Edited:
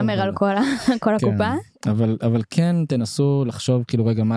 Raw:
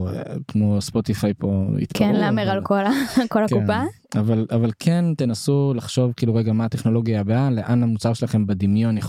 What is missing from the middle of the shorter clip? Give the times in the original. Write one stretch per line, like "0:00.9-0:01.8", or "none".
none